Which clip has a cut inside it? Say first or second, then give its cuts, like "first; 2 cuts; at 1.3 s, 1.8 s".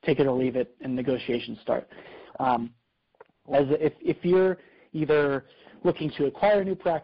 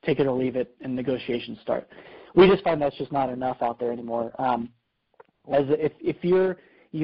first; 1 cut; at 2.3 s